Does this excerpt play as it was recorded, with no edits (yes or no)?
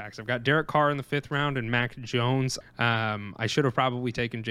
no